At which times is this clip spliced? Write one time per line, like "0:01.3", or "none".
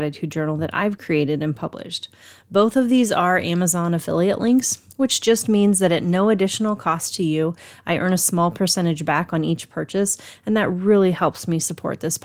none